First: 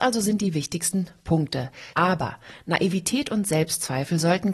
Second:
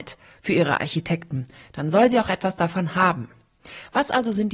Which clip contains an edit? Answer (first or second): first